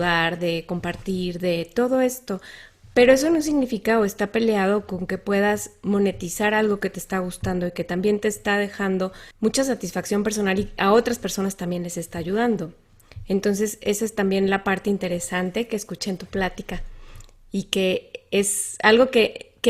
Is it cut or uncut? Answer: cut